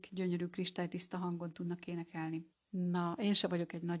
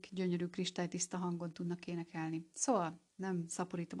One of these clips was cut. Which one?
first; 1 cut; at 2.5 s

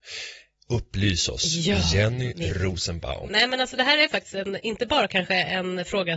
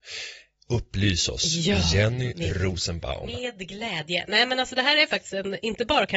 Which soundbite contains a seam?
first; 1 cut; at 3.3 s

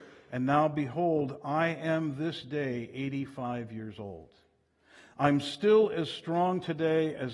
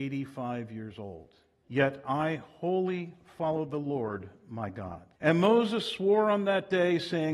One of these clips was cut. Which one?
second; 2 cuts; at 1.6 s, 5.2 s

